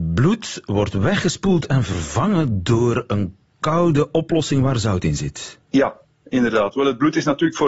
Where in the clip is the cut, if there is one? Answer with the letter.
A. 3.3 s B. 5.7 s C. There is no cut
B